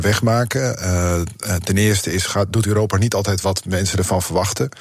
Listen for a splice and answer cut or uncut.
uncut